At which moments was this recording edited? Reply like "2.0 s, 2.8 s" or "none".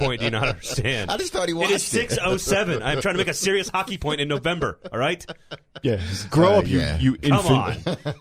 none